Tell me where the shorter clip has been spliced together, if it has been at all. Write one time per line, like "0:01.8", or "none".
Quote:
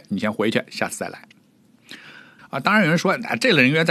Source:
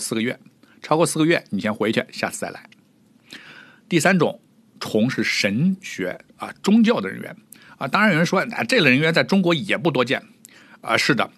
0:02.4